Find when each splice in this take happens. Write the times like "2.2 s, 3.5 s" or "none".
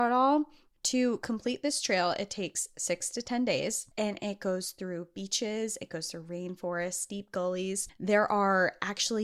3.9 s, 7.9 s